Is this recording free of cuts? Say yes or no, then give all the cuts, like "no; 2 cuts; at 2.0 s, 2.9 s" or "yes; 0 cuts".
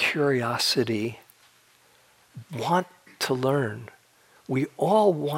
yes; 0 cuts